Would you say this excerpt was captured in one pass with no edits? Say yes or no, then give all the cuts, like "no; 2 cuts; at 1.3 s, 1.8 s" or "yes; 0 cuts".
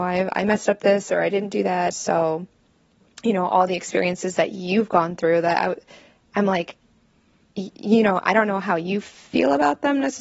no; 1 cut; at 1.9 s